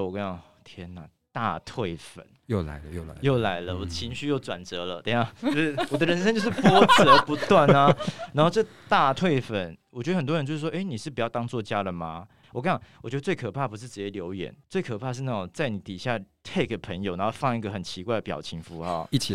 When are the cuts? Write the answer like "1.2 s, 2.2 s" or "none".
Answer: 12.4 s, 14.6 s